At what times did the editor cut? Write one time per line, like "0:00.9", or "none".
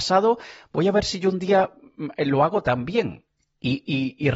none